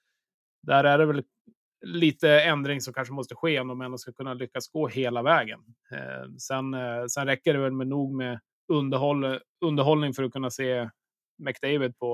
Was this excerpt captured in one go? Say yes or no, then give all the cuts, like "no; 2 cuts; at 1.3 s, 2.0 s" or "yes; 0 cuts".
yes; 0 cuts